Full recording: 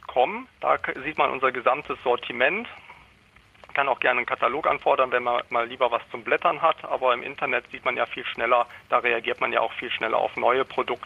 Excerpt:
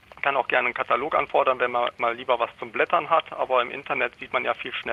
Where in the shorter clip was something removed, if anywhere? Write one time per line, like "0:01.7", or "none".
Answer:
none